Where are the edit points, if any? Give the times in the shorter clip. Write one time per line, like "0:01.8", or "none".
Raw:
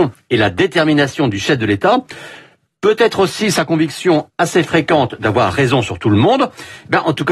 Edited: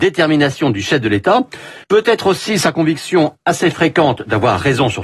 0:01.8